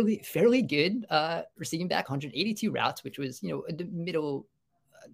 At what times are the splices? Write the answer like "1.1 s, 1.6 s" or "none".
none